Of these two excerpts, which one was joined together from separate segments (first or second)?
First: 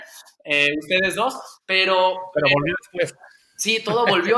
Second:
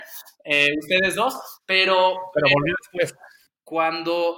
second